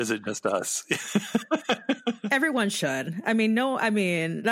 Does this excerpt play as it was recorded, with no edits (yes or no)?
yes